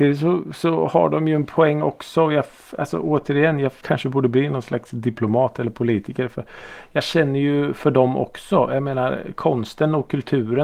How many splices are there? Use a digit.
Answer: 1